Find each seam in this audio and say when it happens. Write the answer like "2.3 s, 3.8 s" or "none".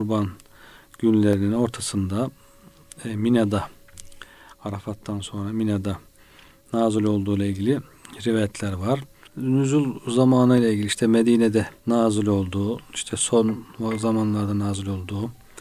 9.3 s, 11.8 s